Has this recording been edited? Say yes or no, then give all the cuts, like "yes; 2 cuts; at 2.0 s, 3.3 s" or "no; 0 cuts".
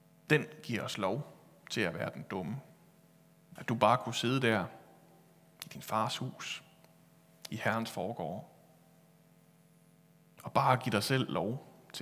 yes; 1 cut; at 3.6 s